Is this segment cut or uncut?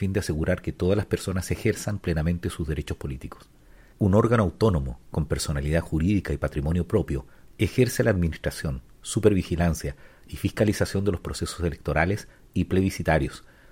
cut